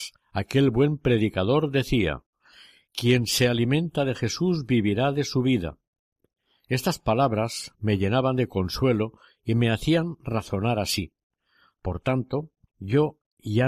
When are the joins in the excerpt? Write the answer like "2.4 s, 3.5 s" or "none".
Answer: 12.7 s